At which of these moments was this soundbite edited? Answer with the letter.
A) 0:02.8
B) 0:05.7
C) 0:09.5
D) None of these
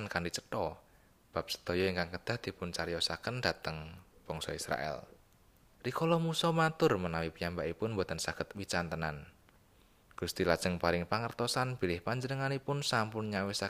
B